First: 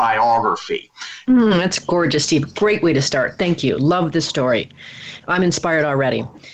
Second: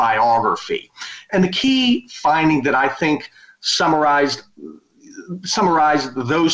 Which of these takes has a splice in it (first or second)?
first